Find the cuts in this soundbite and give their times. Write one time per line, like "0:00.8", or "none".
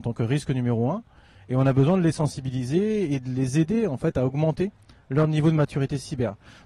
none